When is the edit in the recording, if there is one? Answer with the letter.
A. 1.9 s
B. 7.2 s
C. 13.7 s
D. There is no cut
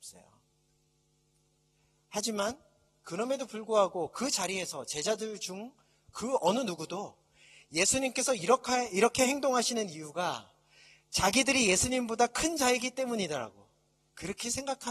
D